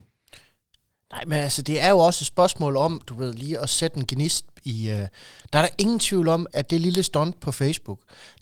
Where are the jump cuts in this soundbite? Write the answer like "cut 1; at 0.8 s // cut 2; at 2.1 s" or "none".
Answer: cut 1; at 6.5 s